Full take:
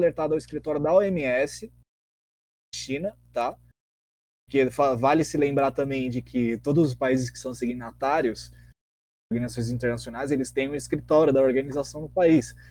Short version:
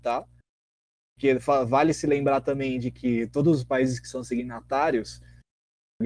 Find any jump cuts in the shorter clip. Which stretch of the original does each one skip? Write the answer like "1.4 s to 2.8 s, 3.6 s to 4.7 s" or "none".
none